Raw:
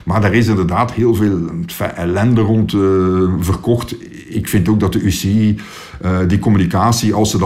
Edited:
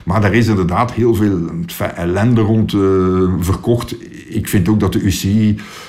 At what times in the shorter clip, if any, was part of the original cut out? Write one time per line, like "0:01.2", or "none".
none